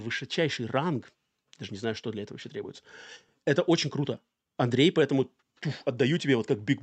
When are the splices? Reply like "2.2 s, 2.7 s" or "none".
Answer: none